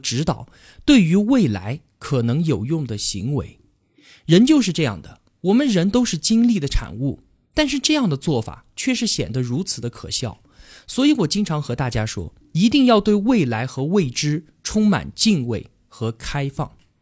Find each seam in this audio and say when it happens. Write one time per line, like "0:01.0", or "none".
none

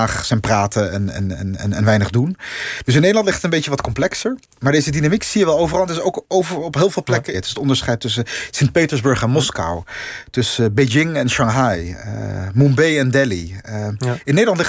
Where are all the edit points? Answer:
0:07.3

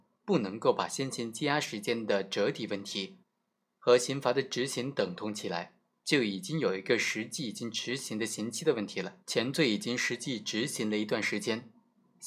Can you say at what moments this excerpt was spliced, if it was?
0:06.0
0:09.2

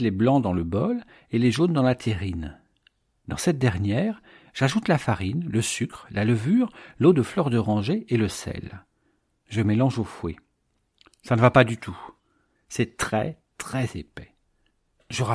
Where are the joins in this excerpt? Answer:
none

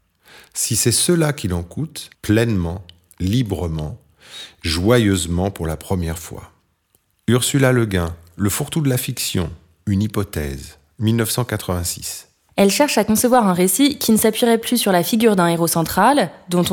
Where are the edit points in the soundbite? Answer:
0:02.1
0:12.5

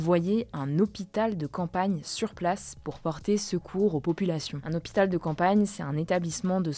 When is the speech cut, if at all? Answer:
none

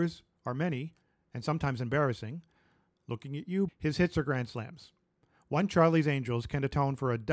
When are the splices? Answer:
0:03.7

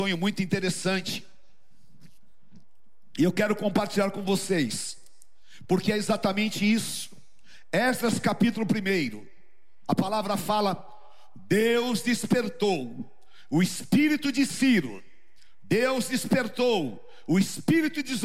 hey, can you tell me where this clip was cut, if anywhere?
none

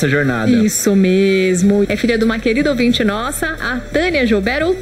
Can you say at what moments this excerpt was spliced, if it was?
0:01.8

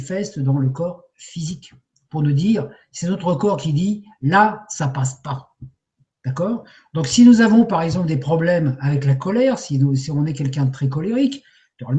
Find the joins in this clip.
none

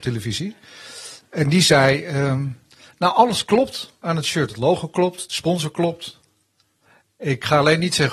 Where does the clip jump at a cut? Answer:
none

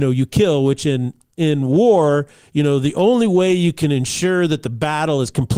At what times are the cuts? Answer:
none

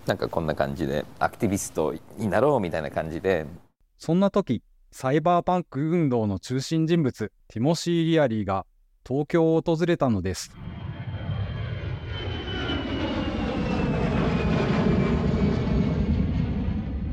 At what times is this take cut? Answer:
0:07.4

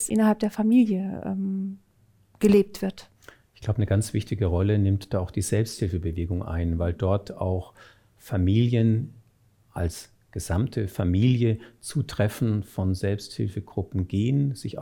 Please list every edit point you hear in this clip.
none

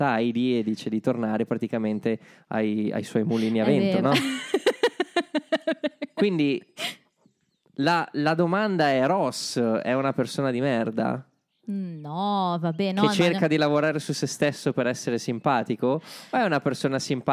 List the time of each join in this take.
none

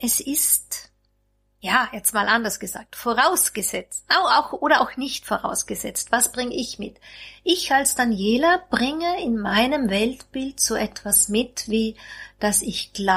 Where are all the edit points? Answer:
none

